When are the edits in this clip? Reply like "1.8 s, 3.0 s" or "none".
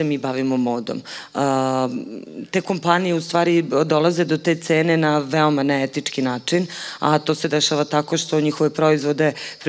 none